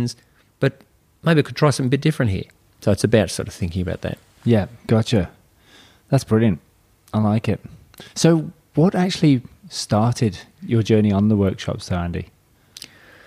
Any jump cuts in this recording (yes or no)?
no